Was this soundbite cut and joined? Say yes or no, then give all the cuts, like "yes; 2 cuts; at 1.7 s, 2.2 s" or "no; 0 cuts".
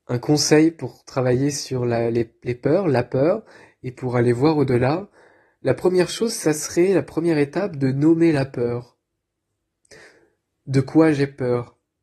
no; 0 cuts